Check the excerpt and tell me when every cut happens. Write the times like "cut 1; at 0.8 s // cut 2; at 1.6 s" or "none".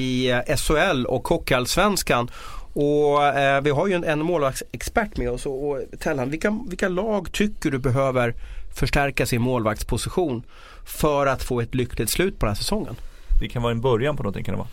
cut 1; at 13.4 s